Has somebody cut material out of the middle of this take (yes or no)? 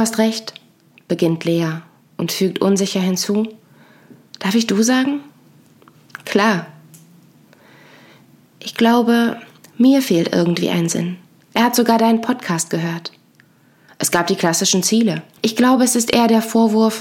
yes